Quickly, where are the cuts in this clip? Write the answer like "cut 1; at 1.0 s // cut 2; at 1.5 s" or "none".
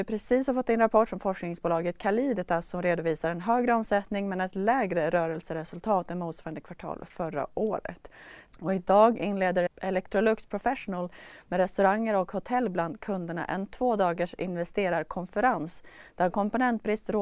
cut 1; at 8.5 s // cut 2; at 9.7 s